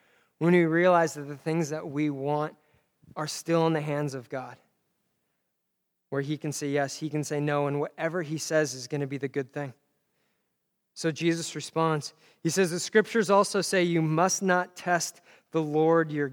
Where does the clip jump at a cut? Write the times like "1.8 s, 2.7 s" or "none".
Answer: none